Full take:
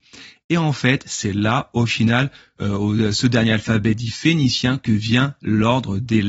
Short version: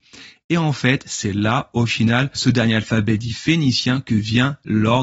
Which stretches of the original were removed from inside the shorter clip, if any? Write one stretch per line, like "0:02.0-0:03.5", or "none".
0:02.4-0:03.1